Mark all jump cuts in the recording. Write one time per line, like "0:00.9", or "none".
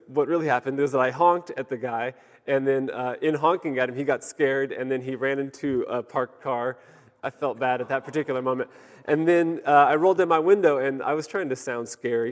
none